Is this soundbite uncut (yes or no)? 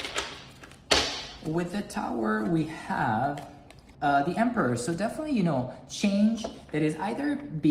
no